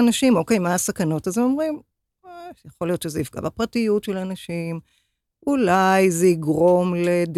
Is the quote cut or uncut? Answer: uncut